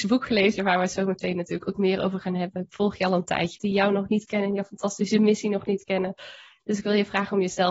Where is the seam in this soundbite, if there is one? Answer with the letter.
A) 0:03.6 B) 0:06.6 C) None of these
A